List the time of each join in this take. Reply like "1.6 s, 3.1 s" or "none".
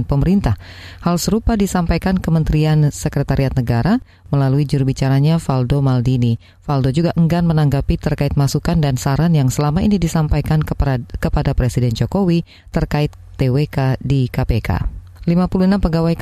none